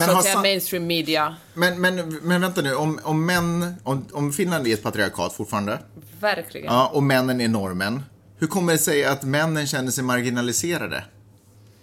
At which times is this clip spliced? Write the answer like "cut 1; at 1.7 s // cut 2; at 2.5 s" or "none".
cut 1; at 3.8 s